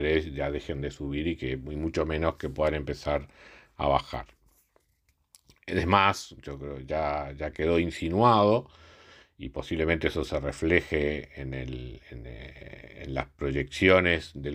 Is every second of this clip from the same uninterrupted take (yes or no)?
yes